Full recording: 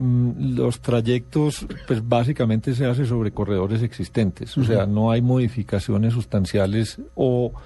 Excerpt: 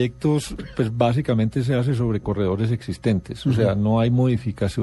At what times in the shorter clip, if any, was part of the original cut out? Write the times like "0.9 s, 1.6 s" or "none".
none